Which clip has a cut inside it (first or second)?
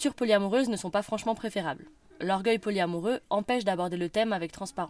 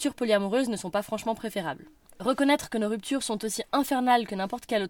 second